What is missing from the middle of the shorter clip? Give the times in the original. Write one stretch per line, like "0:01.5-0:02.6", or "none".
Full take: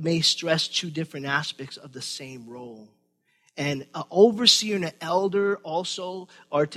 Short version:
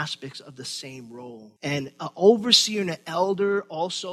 0:02.9-0:03.5